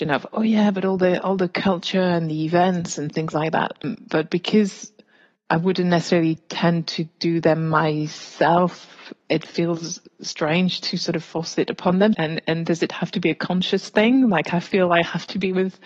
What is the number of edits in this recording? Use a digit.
1